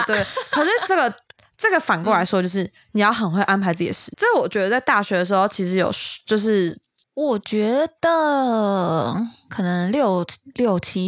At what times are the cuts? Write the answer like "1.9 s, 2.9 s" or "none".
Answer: 4.1 s, 7.0 s

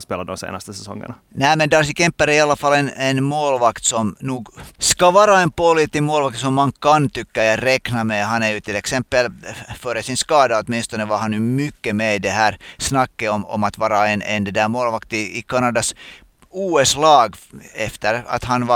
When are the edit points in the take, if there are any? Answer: none

